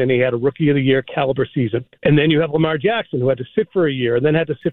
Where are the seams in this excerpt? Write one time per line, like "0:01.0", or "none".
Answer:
0:01.9